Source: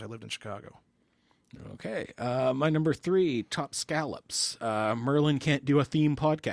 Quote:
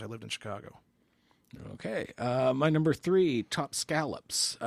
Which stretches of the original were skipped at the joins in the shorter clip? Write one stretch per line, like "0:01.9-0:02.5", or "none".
none